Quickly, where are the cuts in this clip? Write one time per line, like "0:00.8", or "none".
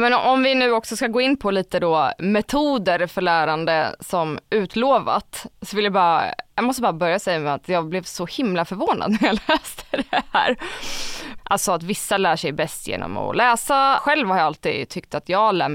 0:11.4
0:14.0